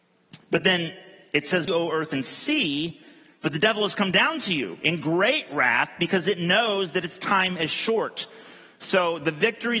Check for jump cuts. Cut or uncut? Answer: cut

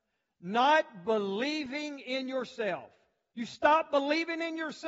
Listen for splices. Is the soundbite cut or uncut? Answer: cut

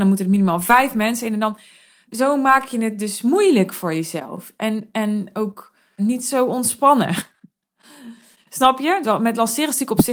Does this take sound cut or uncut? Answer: cut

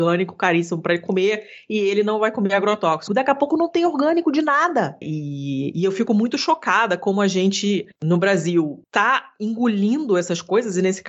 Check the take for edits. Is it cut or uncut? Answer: cut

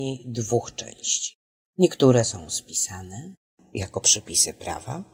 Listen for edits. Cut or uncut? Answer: cut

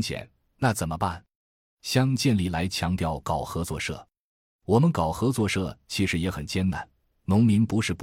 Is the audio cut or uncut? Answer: uncut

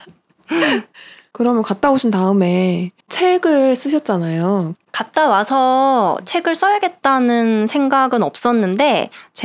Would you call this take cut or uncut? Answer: cut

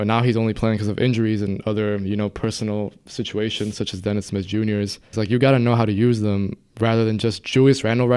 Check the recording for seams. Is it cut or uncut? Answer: cut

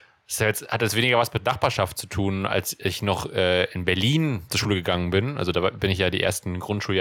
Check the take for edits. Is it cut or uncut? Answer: uncut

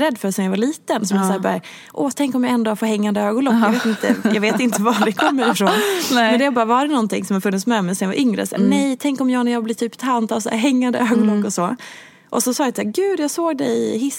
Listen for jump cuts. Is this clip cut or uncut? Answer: uncut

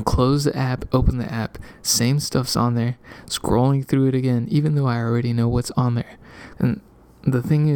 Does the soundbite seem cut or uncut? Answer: cut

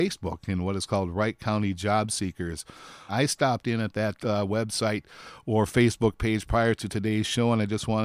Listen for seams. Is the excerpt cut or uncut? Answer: cut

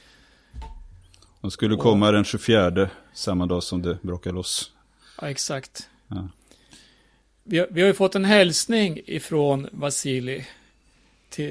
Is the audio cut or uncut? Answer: uncut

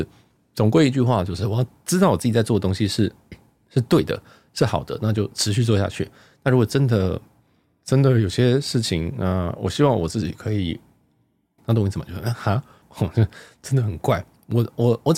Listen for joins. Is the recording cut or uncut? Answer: cut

